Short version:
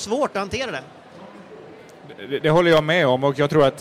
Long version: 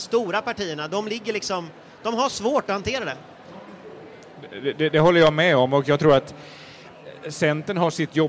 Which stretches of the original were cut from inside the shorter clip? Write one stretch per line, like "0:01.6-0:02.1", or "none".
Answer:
0:04.7-0:04.9